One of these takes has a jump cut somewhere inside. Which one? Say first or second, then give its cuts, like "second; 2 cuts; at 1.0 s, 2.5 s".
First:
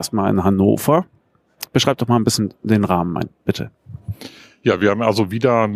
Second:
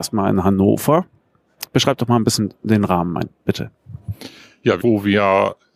second; 1 cut; at 4.8 s